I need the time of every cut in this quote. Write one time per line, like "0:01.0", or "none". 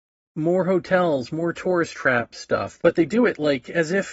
0:02.8

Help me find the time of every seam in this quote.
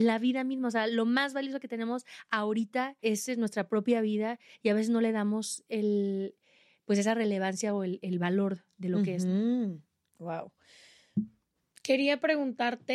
none

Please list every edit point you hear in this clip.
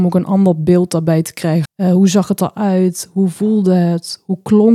0:01.7

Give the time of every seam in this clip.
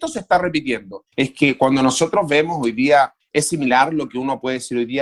0:01.1
0:03.2

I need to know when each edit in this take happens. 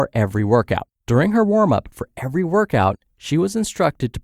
0:00.9

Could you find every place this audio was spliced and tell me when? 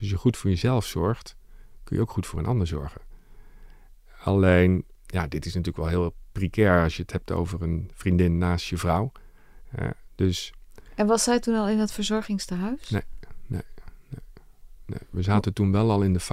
none

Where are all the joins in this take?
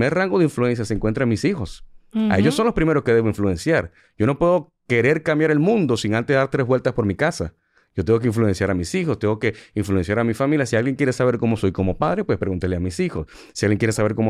none

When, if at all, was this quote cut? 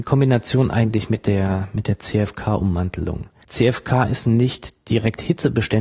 0:03.4

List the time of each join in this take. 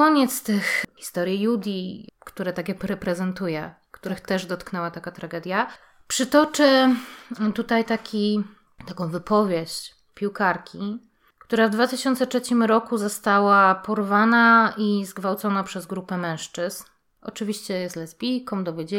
0:02.1

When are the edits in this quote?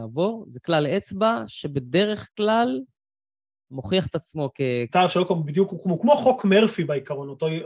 0:04.9

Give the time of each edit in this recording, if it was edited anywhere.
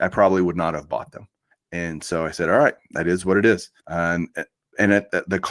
0:01.5
0:03.8

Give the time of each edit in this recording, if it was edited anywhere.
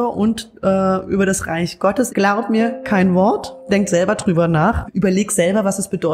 0:02.1
0:04.9

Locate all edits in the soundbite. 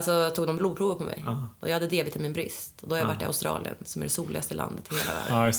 none

